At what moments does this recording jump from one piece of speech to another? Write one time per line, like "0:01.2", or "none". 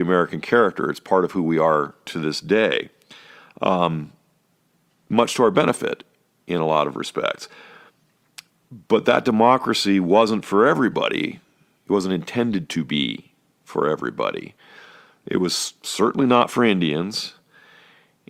none